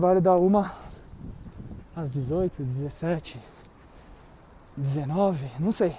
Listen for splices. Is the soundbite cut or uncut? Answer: uncut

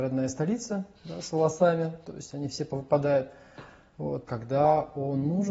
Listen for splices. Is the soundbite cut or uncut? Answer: cut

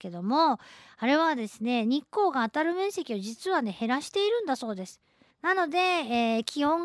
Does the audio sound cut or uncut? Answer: cut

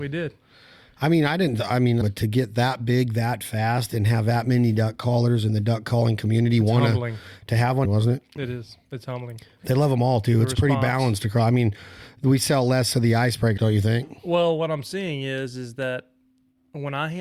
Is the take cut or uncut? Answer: cut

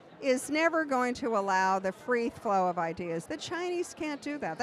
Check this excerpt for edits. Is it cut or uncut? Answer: cut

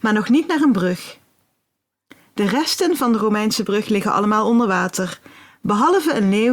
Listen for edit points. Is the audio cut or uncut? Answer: uncut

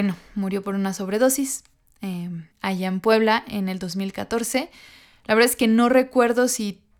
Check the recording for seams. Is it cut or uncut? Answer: cut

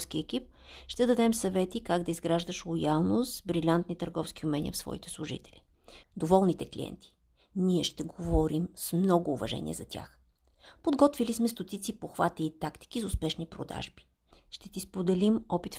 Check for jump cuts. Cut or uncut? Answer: cut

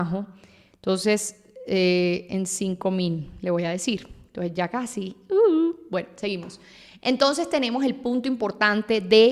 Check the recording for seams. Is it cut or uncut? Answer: uncut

